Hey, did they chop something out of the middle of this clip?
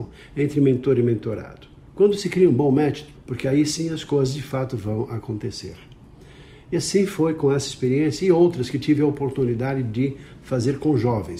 yes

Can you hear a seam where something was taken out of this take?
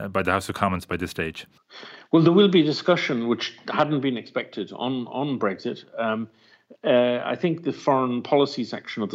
no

